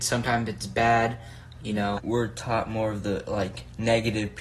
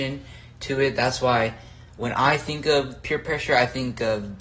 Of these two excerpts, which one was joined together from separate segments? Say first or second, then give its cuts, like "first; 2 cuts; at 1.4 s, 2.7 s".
first; 1 cut; at 1.9 s